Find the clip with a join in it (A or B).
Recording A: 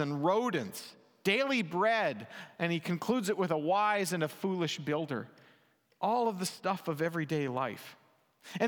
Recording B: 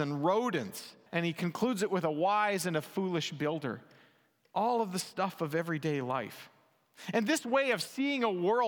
B